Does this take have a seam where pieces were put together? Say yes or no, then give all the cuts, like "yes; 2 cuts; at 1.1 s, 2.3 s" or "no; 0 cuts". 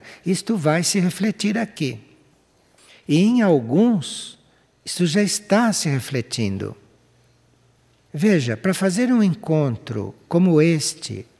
no; 0 cuts